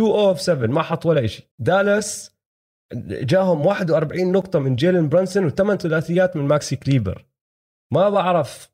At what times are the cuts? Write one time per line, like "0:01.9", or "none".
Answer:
0:01.5